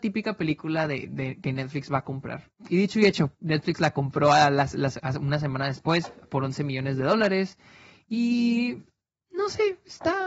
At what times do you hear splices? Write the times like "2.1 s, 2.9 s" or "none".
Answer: none